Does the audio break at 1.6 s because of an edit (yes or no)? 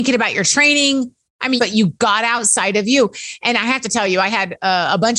yes